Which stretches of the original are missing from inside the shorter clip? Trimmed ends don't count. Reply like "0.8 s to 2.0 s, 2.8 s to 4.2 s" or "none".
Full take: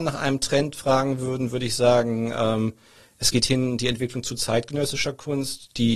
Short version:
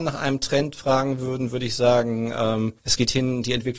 2.8 s to 3.1 s

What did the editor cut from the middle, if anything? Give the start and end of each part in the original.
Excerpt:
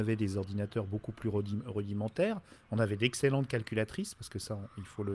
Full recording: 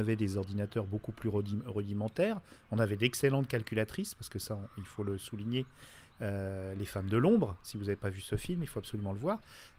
none

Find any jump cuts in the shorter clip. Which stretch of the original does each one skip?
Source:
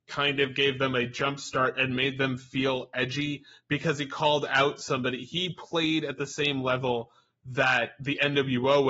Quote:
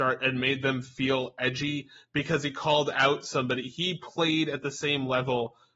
none

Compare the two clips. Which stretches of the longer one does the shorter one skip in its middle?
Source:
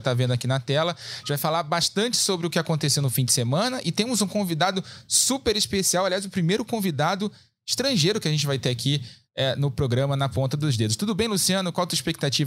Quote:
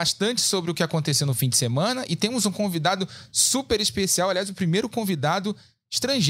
none

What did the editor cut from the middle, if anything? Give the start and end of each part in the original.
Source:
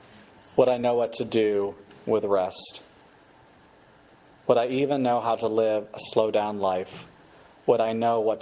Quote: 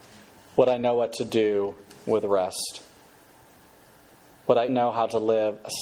4.7 s to 5.0 s

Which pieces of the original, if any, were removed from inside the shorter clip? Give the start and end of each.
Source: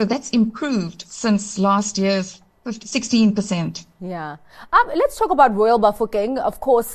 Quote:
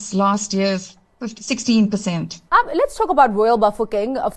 3.9 s to 4.7 s

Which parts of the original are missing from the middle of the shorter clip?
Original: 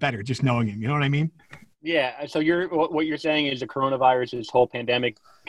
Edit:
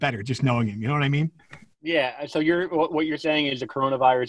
none

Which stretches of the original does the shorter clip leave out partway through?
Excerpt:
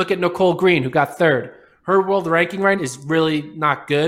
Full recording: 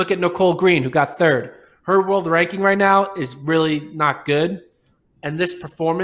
2.8 s to 3.1 s

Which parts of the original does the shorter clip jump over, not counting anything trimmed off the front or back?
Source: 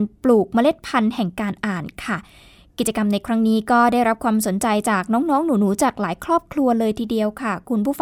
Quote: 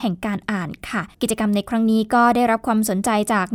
2.3 s to 2.7 s

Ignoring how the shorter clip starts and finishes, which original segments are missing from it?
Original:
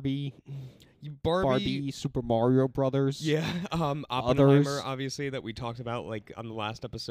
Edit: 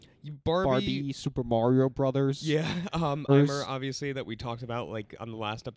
4.1 s to 4.5 s

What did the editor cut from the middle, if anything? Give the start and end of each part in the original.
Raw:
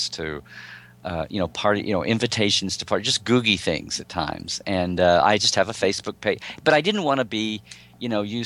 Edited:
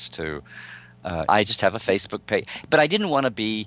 1.3 s to 5.2 s

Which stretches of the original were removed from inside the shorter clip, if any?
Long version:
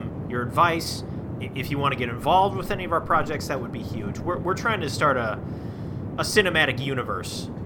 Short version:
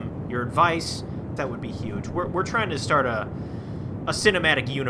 1.4 s to 3.5 s

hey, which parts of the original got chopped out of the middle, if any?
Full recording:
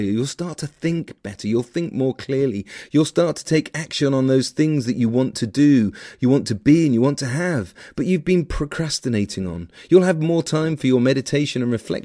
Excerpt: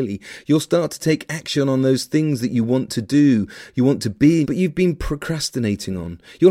6.9 s to 7.9 s

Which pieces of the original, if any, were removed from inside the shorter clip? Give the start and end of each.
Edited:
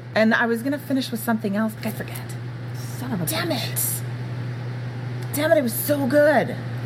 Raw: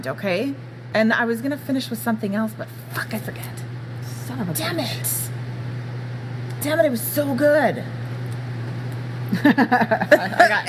2.6 s to 3.1 s

